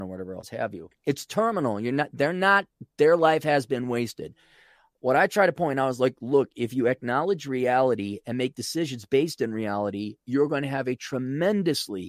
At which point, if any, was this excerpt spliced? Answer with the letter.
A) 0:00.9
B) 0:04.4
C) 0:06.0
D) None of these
A